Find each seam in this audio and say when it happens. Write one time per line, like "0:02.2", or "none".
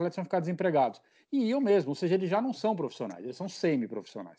none